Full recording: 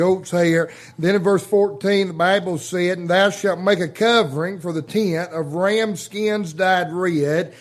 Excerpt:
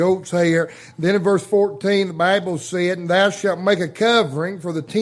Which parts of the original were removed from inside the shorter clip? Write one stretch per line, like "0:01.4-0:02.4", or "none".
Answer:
none